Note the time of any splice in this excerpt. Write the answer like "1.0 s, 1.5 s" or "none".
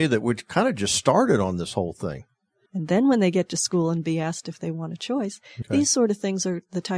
2.7 s, 5.6 s